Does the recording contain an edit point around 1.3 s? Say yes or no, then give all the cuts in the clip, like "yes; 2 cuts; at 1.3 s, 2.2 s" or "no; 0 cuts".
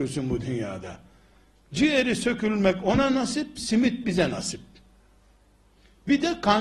no; 0 cuts